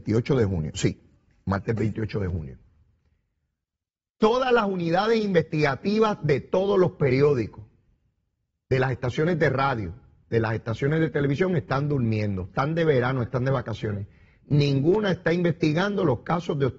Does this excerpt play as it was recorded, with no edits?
yes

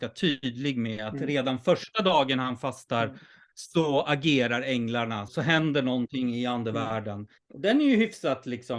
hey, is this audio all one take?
no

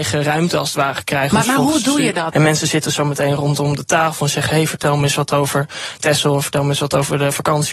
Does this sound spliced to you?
yes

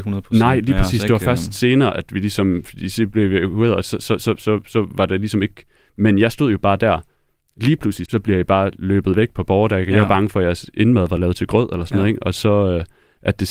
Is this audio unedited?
no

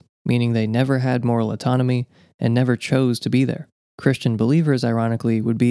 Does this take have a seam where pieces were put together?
no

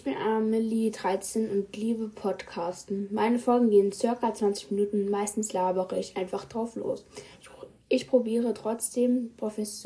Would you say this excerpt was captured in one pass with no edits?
yes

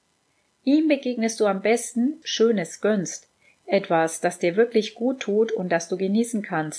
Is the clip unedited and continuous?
no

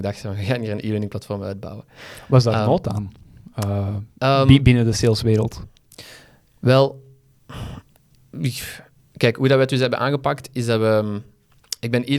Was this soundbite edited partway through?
no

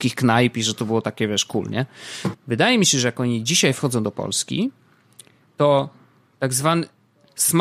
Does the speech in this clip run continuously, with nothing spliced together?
no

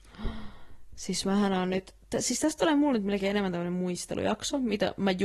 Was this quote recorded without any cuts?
yes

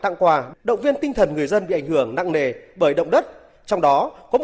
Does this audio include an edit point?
no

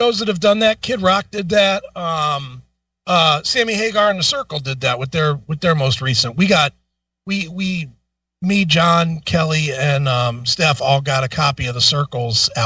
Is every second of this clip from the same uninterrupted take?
yes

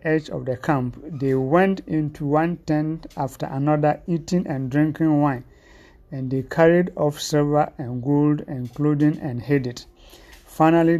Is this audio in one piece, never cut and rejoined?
yes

